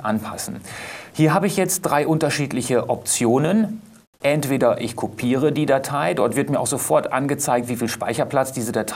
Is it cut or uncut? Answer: uncut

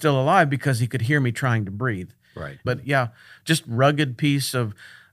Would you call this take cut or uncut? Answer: cut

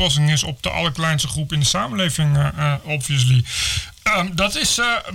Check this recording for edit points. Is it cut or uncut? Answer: uncut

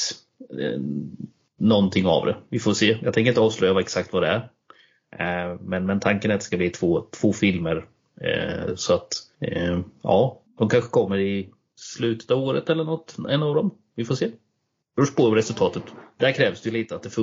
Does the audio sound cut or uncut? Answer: uncut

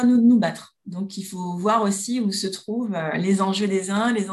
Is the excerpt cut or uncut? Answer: uncut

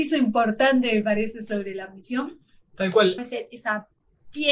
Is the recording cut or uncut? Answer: cut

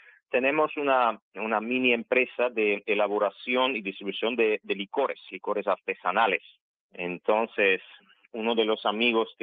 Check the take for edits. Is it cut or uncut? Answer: uncut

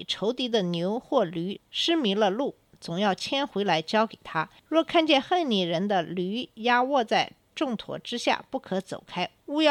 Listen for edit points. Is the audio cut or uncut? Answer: cut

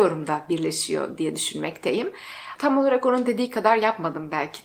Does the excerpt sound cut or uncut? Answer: cut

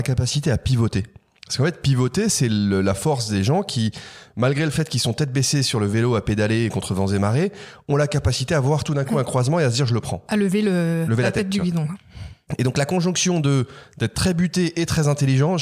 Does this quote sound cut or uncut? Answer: uncut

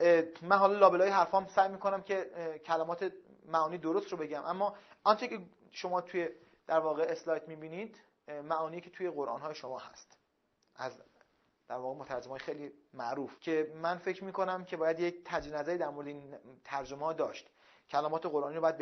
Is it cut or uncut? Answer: cut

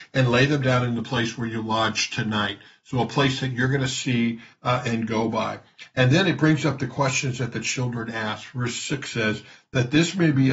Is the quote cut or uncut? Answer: uncut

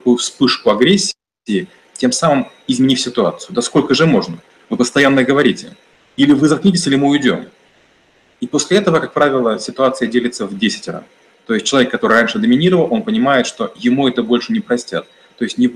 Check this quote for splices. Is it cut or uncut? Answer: uncut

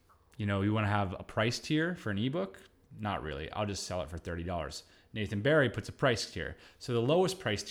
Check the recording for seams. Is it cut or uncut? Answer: uncut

